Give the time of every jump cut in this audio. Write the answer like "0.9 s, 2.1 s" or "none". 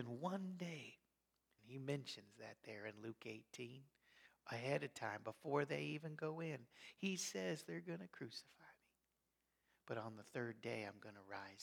1.6 s